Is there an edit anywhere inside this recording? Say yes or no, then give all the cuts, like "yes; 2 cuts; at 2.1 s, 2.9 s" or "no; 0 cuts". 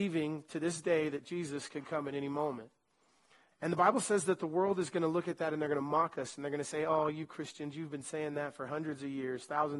yes; 1 cut; at 3.5 s